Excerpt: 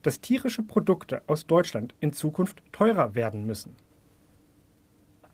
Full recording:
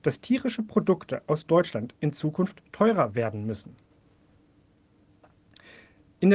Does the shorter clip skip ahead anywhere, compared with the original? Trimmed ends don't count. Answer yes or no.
no